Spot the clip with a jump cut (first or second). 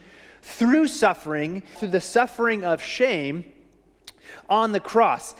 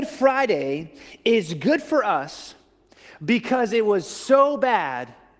first